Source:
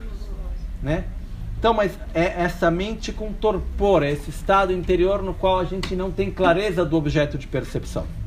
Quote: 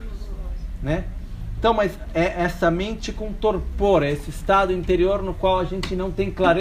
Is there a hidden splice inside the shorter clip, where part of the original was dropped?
no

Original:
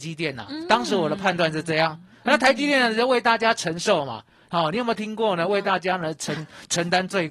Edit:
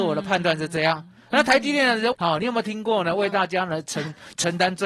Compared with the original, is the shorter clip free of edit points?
no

